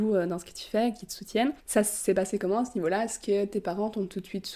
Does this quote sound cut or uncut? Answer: cut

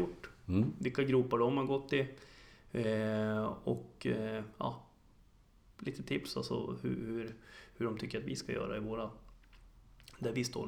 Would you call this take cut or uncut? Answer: uncut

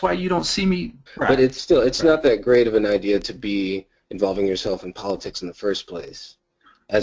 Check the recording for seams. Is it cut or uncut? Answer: cut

